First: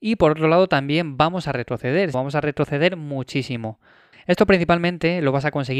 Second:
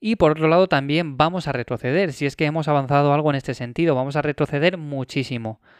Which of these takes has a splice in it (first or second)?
first